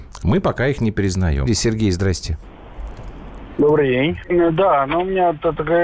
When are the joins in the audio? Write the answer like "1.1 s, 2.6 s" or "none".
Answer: 1.5 s, 4.2 s